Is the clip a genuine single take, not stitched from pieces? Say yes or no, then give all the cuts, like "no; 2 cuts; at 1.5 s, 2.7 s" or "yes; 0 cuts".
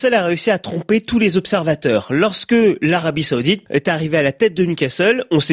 yes; 0 cuts